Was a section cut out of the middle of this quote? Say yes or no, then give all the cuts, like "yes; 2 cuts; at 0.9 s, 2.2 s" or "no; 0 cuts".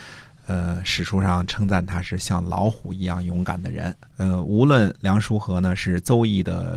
yes; 1 cut; at 4.1 s